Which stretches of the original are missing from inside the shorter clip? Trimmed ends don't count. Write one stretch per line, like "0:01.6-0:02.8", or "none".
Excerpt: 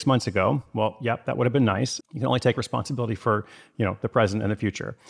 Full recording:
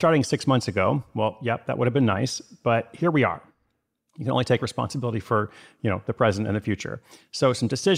0:02.4-0:04.1